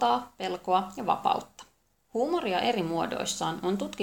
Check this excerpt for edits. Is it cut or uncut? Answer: cut